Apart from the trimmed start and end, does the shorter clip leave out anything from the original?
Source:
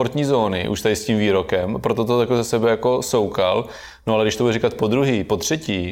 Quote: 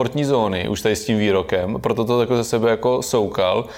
no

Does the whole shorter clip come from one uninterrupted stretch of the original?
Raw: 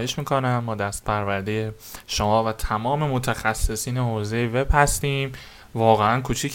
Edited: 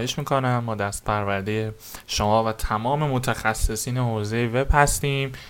yes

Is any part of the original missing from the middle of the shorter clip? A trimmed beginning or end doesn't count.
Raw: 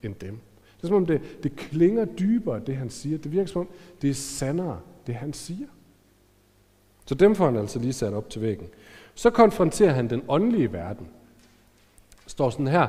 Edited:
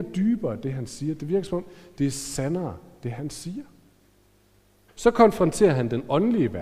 yes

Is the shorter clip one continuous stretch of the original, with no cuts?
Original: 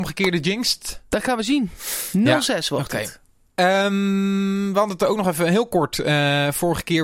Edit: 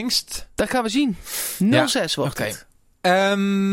yes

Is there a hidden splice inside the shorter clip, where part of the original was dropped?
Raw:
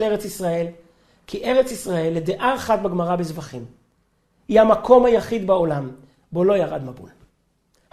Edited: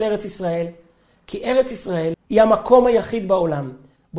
yes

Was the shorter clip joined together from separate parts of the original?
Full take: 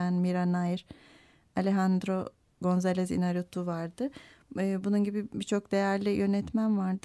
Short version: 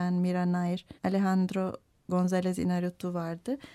yes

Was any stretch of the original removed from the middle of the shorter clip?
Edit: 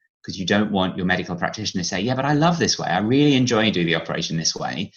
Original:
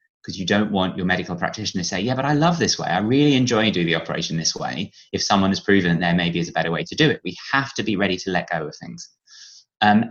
no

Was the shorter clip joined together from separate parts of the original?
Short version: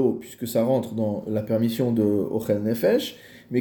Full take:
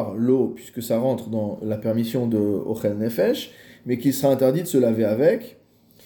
no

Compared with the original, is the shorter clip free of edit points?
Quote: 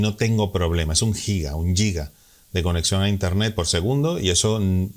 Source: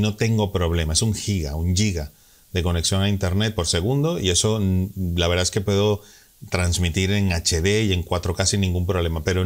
yes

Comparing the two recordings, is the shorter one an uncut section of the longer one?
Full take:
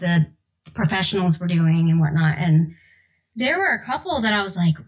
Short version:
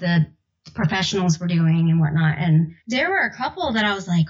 no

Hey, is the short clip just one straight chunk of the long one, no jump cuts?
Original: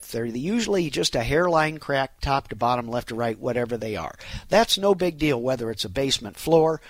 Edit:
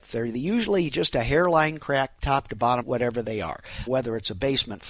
no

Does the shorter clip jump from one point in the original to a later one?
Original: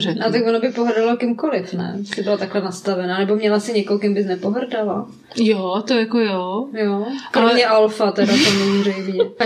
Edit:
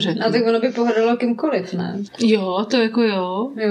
yes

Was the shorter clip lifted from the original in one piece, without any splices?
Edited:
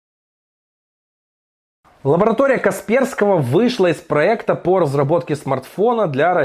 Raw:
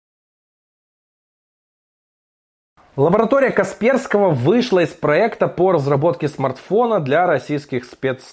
yes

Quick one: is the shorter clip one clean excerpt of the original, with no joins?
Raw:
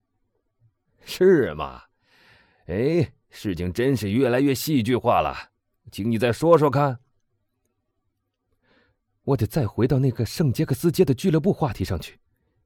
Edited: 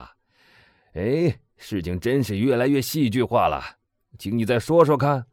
yes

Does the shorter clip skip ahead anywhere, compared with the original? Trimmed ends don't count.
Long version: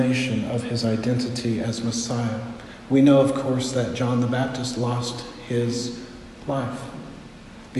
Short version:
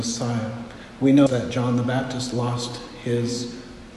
yes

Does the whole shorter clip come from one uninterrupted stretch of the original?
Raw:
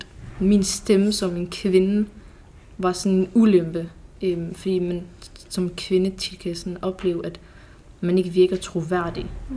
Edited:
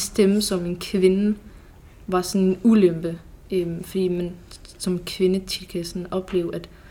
yes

